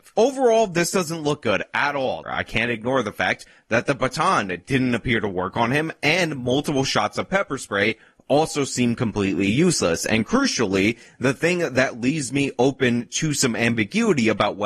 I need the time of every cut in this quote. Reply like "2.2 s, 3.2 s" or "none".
2.2 s